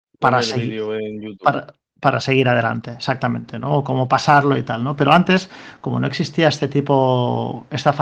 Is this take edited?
no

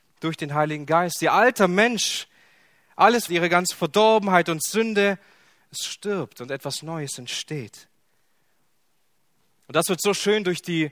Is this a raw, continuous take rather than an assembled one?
no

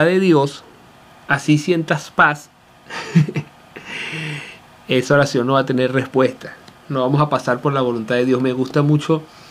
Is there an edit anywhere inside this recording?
no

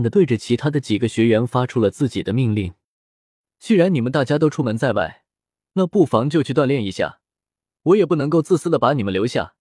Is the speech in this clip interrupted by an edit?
no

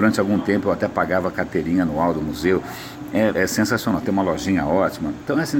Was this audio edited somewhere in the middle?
yes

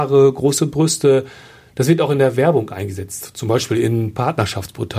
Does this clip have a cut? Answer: no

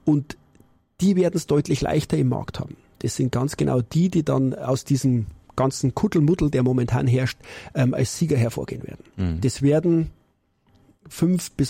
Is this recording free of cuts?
yes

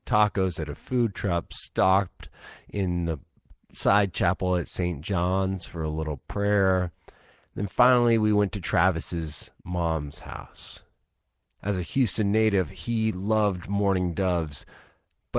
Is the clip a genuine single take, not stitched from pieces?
no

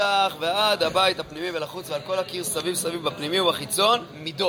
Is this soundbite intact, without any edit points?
yes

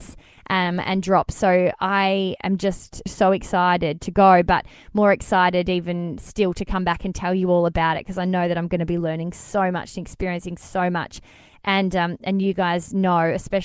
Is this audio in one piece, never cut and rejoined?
no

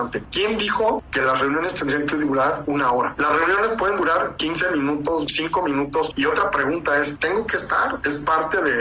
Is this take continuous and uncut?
yes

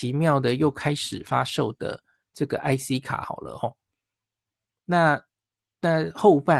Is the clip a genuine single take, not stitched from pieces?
no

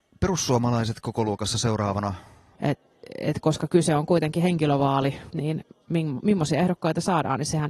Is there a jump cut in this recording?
yes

